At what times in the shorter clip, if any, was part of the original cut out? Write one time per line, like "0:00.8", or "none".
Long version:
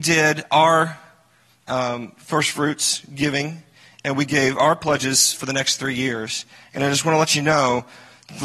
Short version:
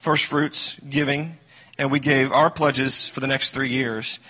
none